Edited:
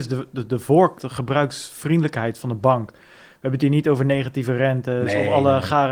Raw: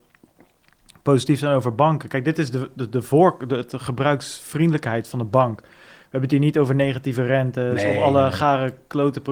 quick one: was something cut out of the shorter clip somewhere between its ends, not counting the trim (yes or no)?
yes